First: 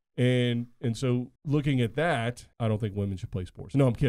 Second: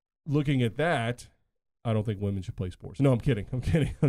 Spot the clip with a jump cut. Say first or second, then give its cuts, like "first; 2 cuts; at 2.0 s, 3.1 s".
first; 2 cuts; at 1.4 s, 2.5 s